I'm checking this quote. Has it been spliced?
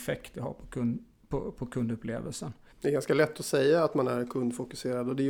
yes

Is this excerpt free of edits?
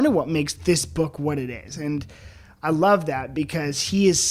yes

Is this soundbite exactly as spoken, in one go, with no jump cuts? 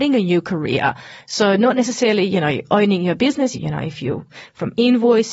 no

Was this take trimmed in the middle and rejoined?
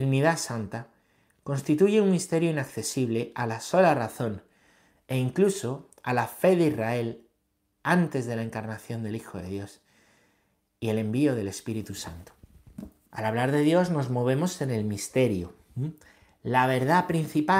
yes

